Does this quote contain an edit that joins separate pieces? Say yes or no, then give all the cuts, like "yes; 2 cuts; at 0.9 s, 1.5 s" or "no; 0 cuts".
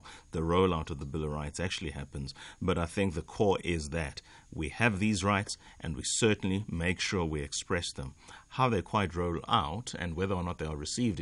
no; 0 cuts